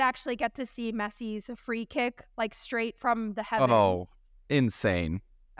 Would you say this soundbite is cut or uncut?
uncut